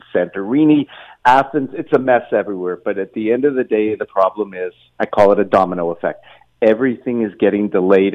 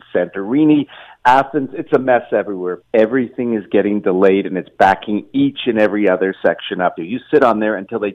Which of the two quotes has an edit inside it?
second; 2 cuts; at 2.8 s, 7.0 s

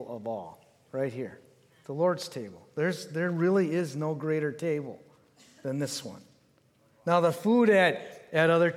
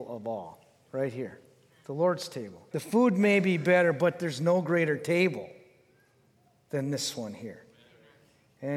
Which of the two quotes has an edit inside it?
second; 1 cut; at 2.7 s

